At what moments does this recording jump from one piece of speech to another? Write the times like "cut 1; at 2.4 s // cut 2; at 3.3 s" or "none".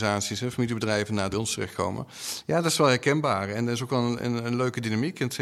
cut 1; at 1.3 s